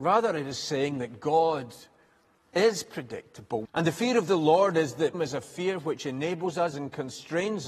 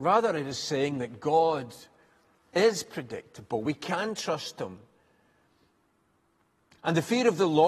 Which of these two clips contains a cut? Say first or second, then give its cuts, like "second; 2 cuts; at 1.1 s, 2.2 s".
first; 3 cuts; at 3.6 s, 5.1 s, 6.7 s